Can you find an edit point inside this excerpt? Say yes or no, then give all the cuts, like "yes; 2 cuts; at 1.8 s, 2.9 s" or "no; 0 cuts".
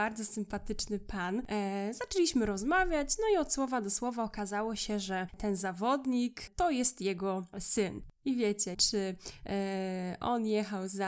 yes; 1 cut; at 8.7 s